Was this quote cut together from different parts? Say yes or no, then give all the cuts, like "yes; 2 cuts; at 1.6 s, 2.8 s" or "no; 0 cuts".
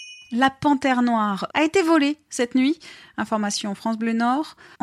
yes; 1 cut; at 1.5 s